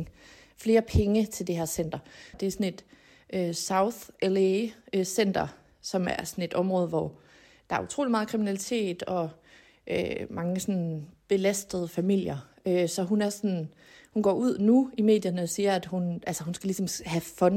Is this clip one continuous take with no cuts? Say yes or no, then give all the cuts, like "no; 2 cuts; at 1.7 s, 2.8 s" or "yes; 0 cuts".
no; 1 cut; at 2.3 s